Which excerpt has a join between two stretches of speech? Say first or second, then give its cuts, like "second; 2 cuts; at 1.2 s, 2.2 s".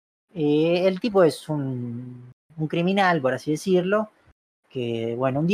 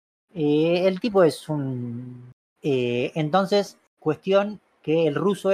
second; 2 cuts; at 2.4 s, 3.9 s